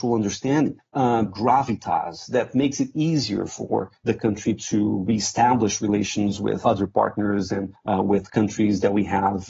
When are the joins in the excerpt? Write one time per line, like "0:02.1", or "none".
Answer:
0:01.3
0:06.6